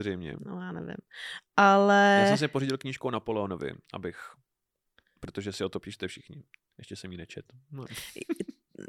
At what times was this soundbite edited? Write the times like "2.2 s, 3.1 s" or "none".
none